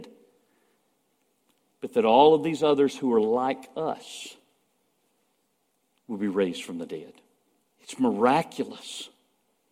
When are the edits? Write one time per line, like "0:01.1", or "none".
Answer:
0:07.6